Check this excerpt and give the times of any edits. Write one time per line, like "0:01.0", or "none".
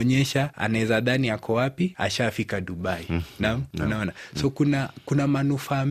none